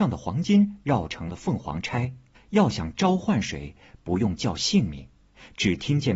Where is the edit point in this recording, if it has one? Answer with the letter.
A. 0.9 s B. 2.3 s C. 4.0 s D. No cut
B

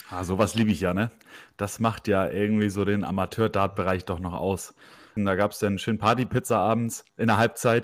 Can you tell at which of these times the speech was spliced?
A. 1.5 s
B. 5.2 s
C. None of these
B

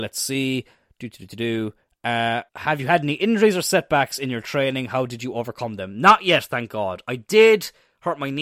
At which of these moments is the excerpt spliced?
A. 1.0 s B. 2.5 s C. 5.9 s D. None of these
B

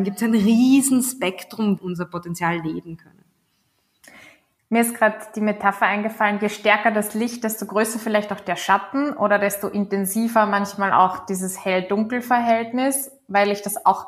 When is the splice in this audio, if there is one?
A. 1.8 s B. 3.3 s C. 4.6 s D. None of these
A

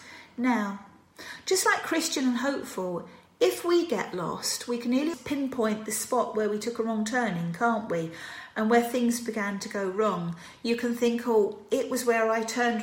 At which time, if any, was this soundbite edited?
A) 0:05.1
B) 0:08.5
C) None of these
A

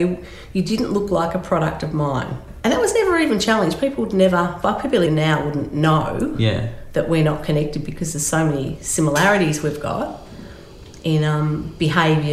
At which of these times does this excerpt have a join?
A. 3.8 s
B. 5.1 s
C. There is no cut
B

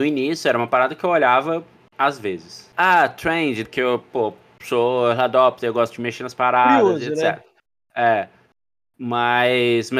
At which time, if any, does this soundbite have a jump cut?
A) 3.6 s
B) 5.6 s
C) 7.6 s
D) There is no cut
A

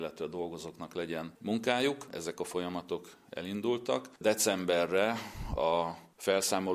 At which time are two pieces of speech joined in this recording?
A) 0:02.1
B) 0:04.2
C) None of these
A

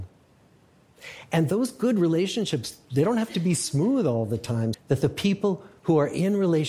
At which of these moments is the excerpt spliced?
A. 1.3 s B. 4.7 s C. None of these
B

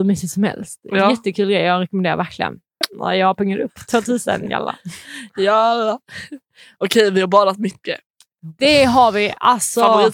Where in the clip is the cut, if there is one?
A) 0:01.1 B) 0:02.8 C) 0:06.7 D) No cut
B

